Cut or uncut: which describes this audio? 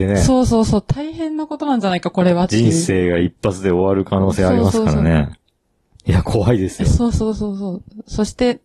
uncut